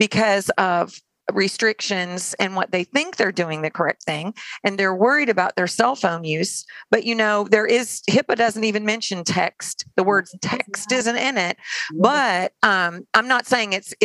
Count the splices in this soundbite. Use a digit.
0